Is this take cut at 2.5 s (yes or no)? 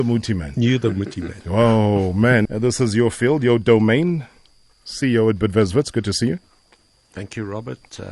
yes